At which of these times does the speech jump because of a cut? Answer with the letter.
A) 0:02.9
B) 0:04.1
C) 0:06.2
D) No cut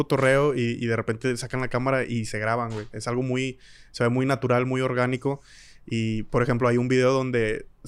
D